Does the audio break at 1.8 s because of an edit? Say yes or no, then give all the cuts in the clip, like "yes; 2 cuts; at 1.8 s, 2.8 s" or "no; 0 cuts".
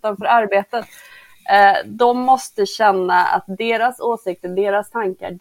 no; 0 cuts